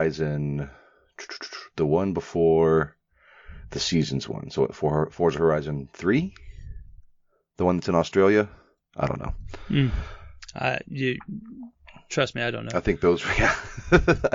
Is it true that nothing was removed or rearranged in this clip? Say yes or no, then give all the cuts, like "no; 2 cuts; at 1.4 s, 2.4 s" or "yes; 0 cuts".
yes; 0 cuts